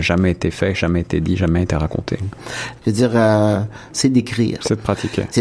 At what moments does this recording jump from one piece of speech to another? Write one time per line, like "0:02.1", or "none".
0:02.8
0:03.9